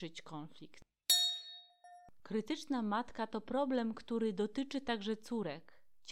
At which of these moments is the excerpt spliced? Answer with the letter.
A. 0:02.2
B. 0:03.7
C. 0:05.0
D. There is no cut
D